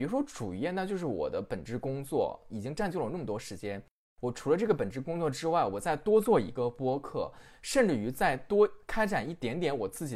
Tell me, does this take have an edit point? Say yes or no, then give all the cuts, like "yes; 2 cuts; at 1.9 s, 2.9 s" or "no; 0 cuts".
no; 0 cuts